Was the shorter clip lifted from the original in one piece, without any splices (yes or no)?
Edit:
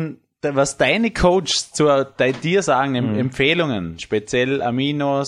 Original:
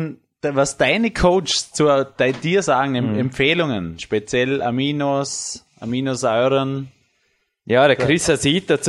yes